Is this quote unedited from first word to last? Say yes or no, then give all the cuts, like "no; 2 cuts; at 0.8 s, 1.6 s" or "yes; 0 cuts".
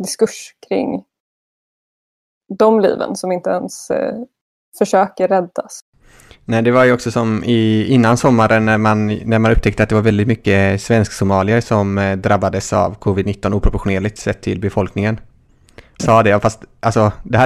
no; 1 cut; at 16.0 s